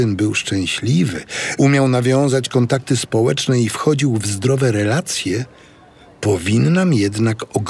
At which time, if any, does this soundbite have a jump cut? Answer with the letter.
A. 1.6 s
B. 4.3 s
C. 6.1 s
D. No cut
A